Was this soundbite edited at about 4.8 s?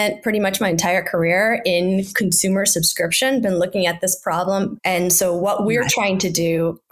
yes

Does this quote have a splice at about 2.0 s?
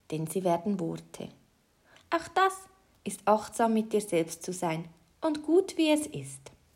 yes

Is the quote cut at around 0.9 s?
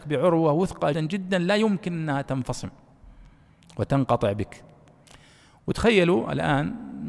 yes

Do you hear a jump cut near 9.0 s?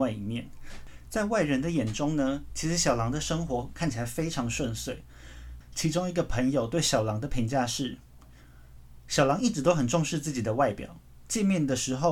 no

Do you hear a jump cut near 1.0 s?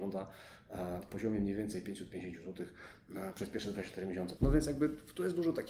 yes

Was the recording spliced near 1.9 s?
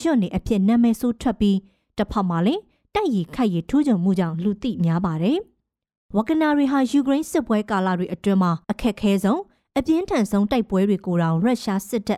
no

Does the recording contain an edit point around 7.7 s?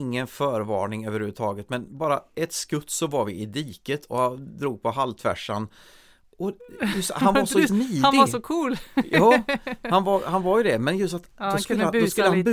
yes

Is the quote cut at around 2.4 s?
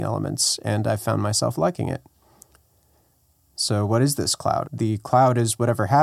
no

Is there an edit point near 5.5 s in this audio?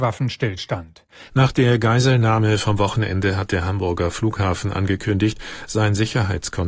no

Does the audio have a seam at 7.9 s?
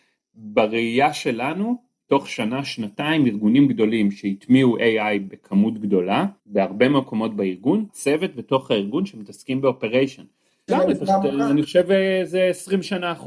yes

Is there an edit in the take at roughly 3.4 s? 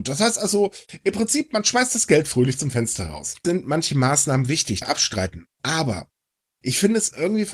yes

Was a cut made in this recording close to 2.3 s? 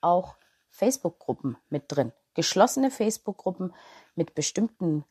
no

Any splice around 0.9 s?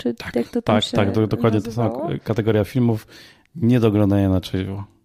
no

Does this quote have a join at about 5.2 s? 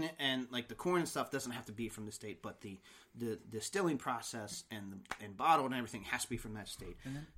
yes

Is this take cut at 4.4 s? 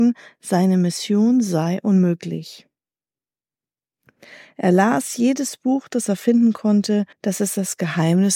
yes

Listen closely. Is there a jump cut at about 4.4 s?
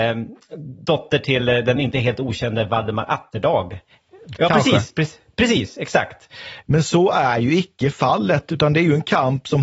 yes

